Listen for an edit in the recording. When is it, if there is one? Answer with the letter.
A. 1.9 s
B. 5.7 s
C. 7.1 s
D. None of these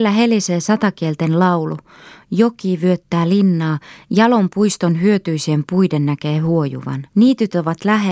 C